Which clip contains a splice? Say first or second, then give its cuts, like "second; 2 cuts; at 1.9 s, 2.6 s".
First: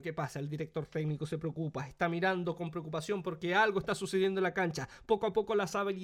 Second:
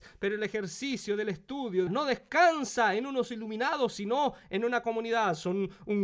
second; 1 cut; at 1.9 s